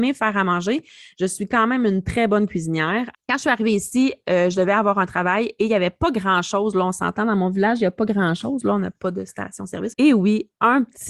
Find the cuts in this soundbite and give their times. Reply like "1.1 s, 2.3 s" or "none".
3.1 s, 9.9 s